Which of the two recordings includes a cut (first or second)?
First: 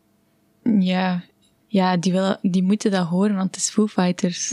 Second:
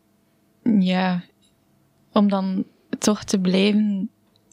first